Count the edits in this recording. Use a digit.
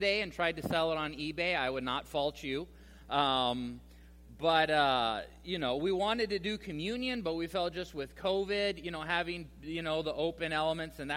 0